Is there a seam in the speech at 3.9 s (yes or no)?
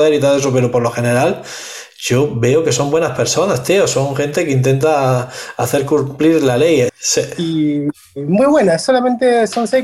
no